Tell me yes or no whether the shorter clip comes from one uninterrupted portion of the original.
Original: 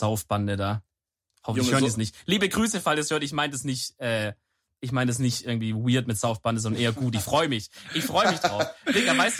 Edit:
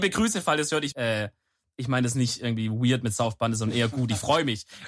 no